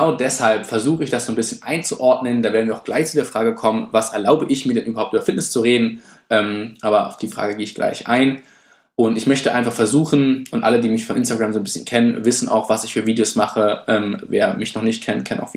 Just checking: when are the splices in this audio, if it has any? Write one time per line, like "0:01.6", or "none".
none